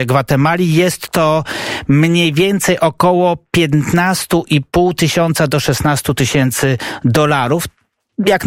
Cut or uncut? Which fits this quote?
uncut